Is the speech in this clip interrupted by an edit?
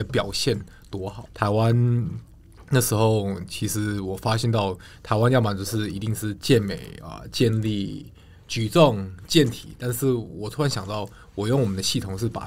yes; 1 cut; at 1.3 s

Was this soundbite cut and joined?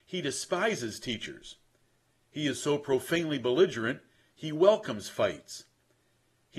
no; 0 cuts

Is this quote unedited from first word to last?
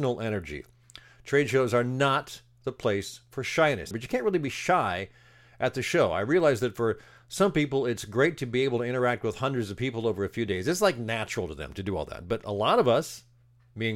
no; 1 cut; at 3.9 s

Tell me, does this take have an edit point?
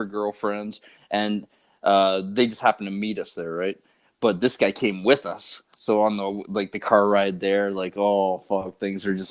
no; 0 cuts

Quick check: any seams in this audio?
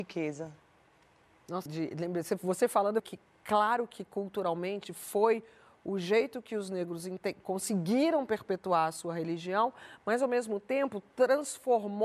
yes; 2 cuts; at 1.7 s, 3.0 s

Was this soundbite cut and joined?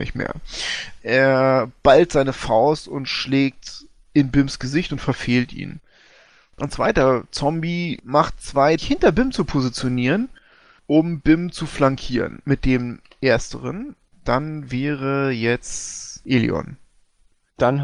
yes; 2 cuts; at 8.8 s, 14.1 s

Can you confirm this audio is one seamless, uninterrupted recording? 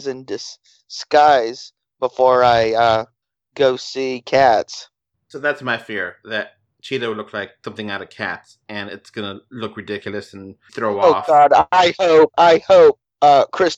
no; 2 cuts; at 10.7 s, 12.3 s

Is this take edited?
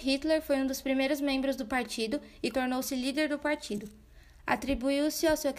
yes; 1 cut; at 2.5 s

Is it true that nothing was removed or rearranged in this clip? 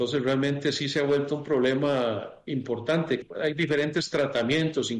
no; 1 cut; at 3.2 s

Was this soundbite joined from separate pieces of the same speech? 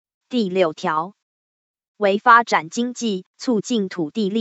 no; 0 cuts

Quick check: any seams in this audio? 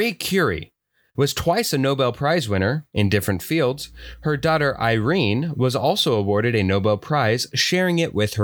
yes; 1 cut; at 1.1 s

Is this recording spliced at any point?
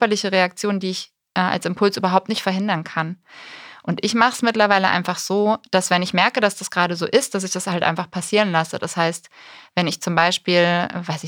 no; 0 cuts

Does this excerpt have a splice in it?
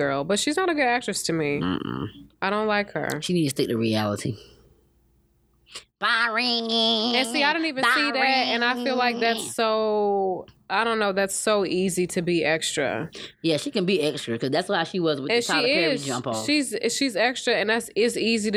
no; 0 cuts

